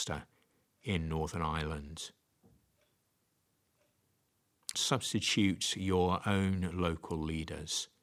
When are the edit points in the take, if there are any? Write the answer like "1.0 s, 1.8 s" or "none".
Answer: 4.7 s